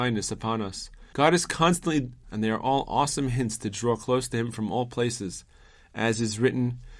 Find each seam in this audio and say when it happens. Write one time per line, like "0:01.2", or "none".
0:01.1
0:02.2